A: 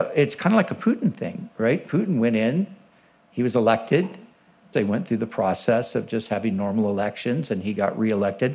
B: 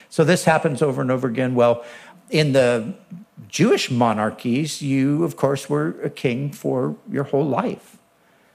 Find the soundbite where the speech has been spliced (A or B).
A